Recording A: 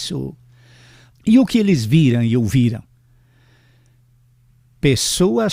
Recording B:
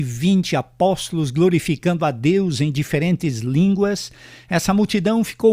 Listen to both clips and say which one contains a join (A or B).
A